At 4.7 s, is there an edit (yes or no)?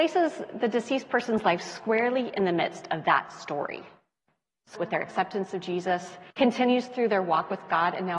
yes